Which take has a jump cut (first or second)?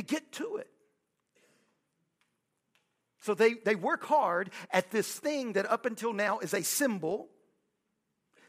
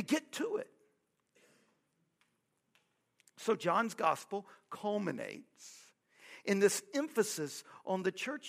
first